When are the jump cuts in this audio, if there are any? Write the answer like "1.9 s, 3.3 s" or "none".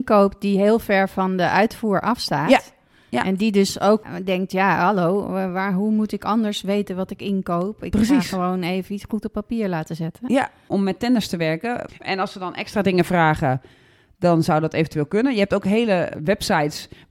10.7 s, 11.9 s